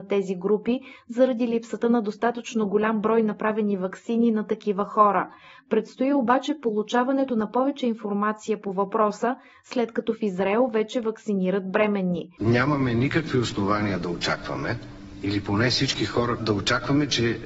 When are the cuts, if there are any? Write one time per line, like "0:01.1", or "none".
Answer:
0:12.4
0:16.4